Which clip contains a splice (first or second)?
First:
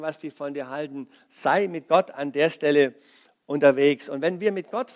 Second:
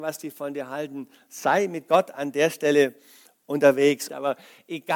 second